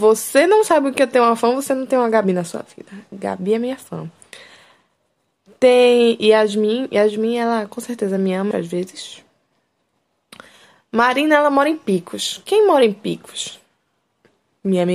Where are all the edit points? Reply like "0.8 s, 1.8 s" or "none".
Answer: 8.5 s